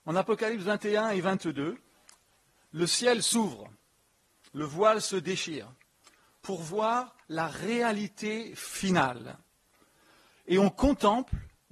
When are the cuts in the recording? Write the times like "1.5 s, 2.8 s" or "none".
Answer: none